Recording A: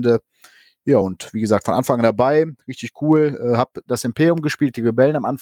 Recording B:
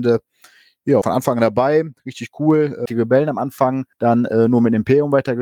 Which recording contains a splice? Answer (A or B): B